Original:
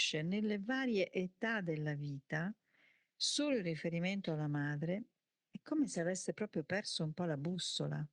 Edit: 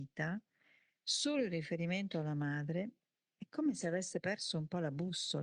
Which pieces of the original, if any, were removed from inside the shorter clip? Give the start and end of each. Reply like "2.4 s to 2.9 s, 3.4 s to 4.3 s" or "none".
6.3 s to 6.7 s